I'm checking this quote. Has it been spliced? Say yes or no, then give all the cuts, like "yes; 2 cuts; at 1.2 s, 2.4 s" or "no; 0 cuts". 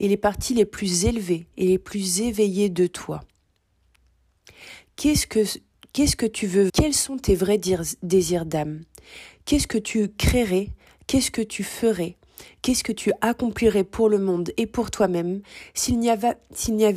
yes; 1 cut; at 6.7 s